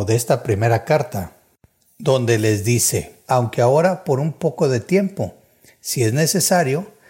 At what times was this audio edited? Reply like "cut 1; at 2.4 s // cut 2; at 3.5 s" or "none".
cut 1; at 3.2 s

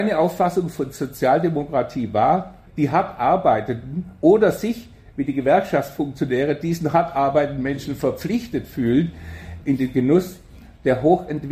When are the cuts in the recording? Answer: cut 1; at 2.7 s // cut 2; at 9.6 s

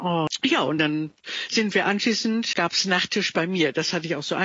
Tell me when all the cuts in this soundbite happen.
cut 1; at 2.5 s

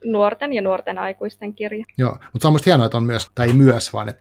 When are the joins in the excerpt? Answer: cut 1; at 1.8 s // cut 2; at 3.3 s

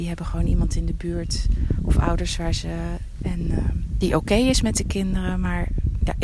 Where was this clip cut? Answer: cut 1; at 3.2 s

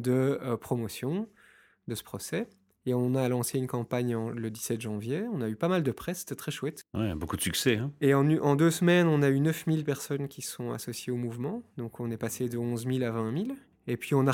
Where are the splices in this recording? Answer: none

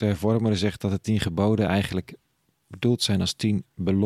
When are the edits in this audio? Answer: none

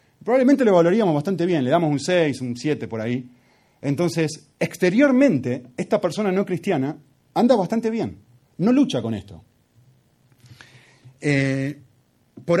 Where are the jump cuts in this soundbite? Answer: cut 1; at 8.5 s

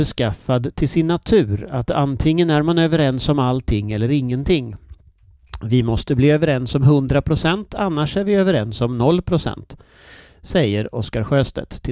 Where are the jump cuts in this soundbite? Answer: none

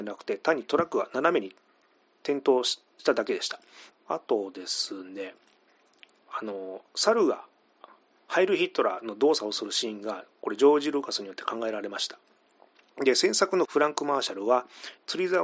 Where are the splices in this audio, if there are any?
cut 1; at 3.9 s

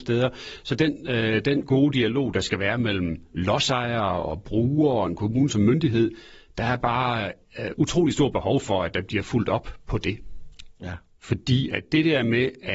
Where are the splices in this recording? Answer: cut 1; at 10.8 s

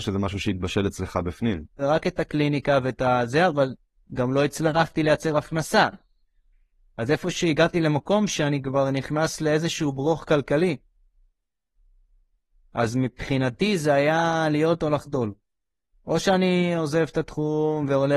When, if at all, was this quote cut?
cut 1; at 1.8 s

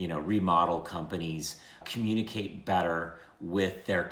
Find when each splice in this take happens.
cut 1; at 1.8 s

